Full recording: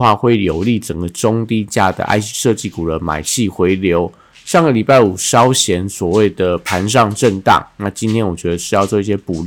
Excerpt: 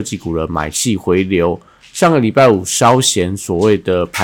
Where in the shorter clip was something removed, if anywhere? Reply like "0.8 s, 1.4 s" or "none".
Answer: none